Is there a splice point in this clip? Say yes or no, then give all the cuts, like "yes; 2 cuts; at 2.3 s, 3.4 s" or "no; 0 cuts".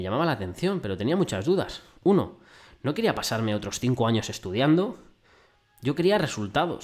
no; 0 cuts